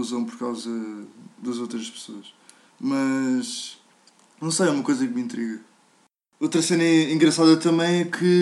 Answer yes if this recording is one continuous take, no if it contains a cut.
yes